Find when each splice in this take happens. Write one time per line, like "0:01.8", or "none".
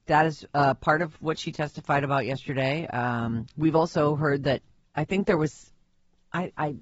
none